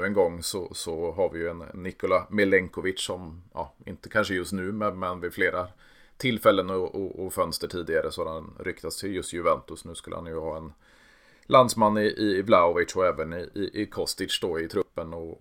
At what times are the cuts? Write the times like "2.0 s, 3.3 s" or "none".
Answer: none